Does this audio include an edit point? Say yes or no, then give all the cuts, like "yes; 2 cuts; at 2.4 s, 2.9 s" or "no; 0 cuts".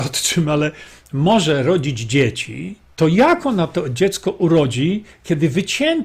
yes; 1 cut; at 2.8 s